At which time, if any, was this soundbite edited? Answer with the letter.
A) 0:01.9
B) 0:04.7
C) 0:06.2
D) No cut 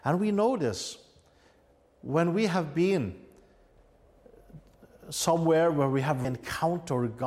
C